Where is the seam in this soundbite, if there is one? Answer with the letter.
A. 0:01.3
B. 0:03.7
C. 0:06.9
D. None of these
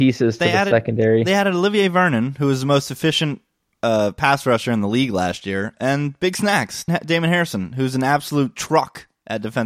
C